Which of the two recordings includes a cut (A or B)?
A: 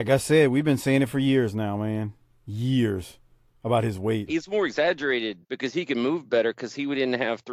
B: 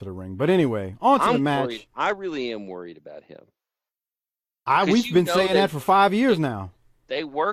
A